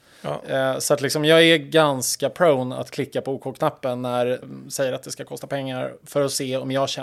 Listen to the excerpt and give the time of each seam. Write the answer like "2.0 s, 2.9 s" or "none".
4.4 s